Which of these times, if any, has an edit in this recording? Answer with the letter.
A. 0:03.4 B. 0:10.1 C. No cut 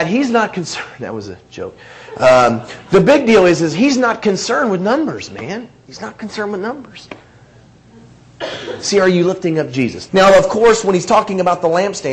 B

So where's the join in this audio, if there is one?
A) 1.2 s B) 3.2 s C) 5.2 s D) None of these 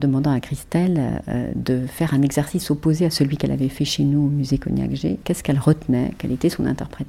C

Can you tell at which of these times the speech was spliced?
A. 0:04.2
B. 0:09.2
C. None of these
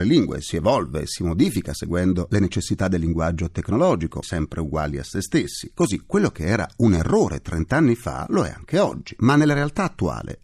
A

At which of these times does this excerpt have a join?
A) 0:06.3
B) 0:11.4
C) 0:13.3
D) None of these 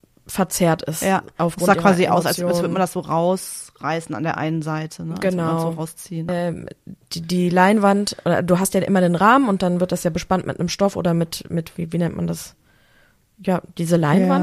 A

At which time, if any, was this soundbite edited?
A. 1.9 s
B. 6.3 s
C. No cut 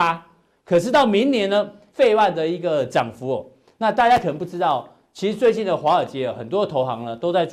A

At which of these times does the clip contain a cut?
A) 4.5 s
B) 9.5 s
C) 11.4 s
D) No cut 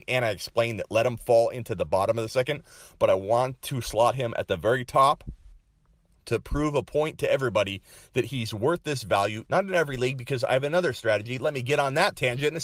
B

